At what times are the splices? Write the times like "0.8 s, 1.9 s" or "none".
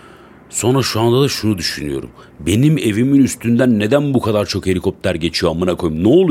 none